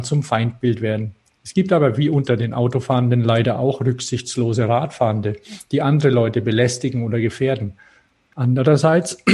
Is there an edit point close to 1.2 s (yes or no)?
no